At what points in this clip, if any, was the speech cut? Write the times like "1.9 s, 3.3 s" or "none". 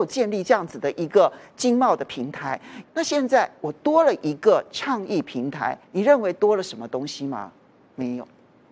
2.8 s, 5.8 s